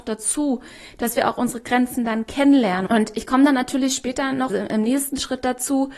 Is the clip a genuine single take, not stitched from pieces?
no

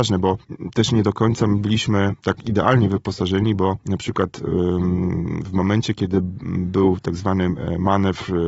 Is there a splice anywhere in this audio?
no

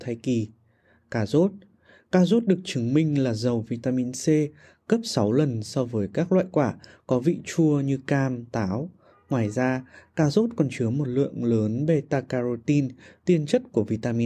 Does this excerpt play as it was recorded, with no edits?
yes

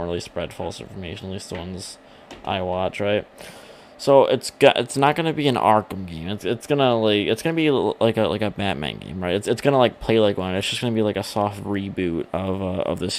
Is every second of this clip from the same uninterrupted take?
yes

